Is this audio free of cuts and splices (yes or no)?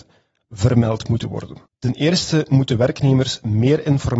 no